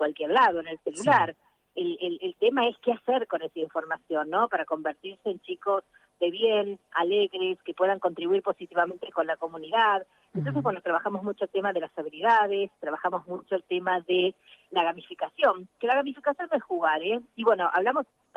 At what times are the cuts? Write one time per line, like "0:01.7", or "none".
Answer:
0:17.3